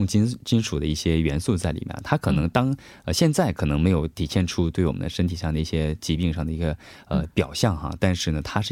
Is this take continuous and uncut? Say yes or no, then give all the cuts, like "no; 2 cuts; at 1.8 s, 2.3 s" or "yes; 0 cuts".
yes; 0 cuts